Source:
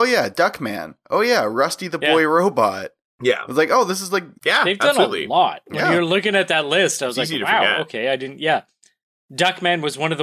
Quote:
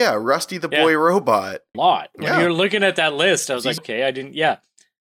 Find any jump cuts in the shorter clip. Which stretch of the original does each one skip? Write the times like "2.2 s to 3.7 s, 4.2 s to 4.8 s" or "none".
3.0 s to 5.3 s, 7.3 s to 7.8 s